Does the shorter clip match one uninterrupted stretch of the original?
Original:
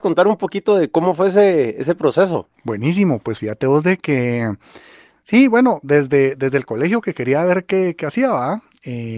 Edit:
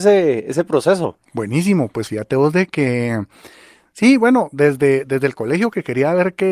yes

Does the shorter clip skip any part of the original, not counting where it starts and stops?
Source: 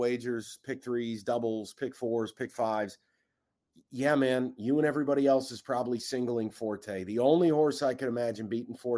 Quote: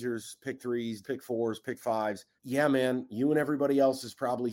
yes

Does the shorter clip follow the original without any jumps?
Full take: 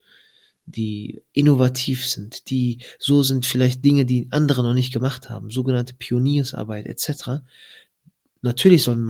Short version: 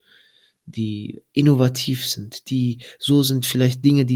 yes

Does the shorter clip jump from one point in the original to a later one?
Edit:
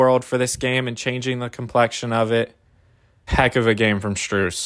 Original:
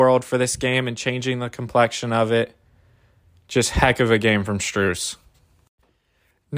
yes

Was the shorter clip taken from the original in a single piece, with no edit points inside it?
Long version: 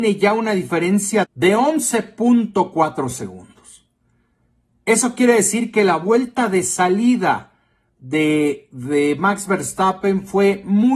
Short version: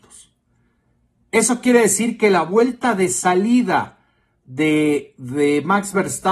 yes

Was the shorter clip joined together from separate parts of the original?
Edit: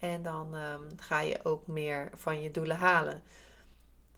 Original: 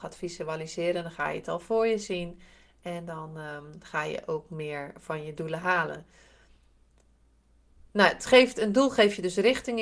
no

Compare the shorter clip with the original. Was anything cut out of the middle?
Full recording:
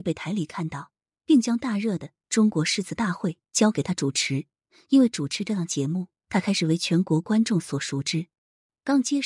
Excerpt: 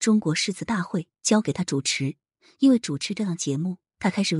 no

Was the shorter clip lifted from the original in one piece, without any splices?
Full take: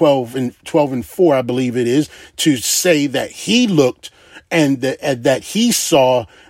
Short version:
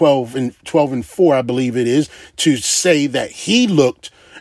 yes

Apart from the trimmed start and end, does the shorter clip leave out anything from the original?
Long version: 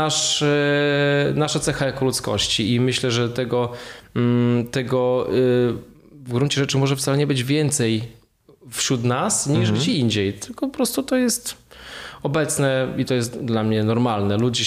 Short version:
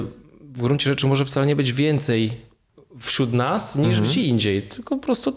no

